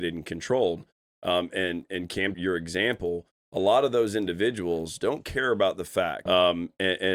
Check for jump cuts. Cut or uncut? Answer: cut